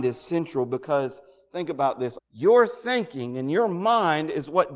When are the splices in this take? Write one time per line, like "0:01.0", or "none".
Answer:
0:02.2